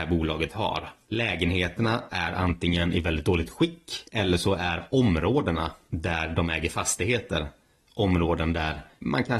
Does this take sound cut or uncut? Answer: uncut